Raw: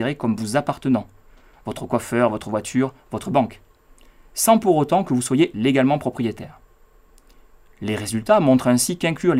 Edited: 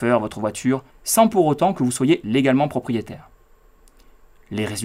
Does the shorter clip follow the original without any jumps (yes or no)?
no